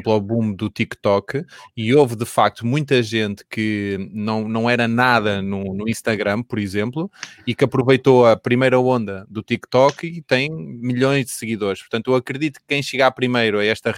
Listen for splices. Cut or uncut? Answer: uncut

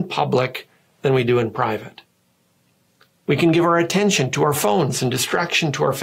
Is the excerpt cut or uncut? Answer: uncut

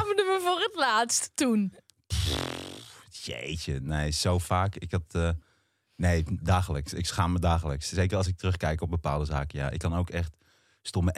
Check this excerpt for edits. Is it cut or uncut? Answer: uncut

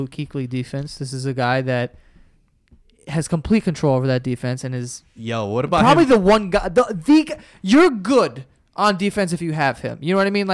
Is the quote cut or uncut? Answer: uncut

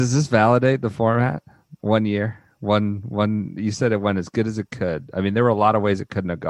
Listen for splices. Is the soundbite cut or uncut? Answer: uncut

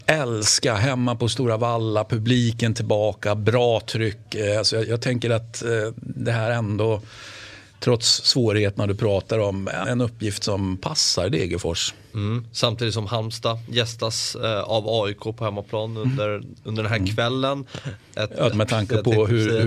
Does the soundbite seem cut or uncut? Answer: cut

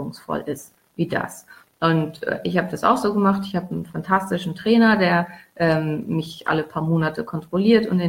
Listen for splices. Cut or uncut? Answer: uncut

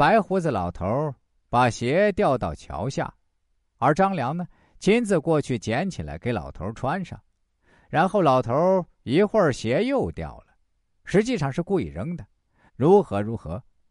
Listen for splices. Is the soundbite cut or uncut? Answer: cut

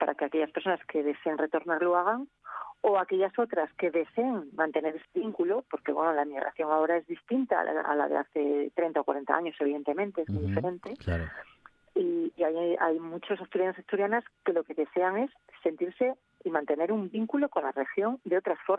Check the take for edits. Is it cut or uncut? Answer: uncut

